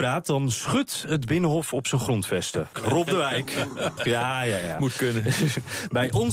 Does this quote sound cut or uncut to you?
cut